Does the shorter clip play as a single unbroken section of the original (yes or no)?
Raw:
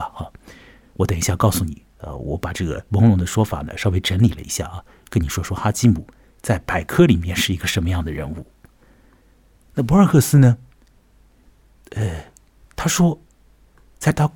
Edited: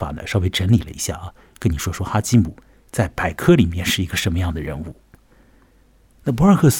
yes